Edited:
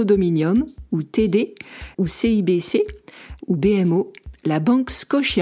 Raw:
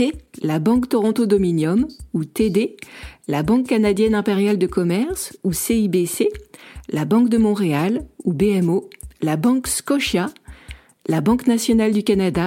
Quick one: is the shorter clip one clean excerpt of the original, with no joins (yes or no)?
no